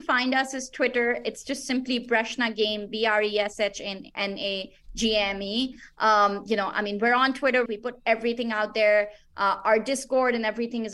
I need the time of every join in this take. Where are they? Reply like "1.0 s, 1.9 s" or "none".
7.7 s